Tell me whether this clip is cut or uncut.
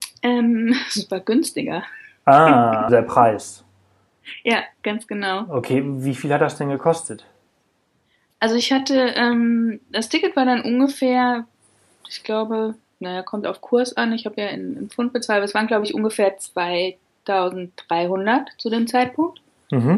cut